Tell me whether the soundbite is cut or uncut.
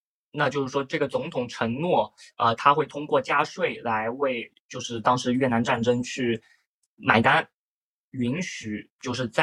cut